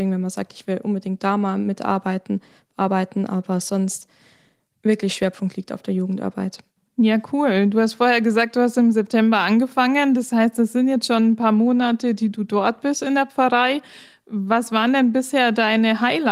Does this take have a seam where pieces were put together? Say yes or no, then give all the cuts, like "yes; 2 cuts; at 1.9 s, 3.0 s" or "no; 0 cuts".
no; 0 cuts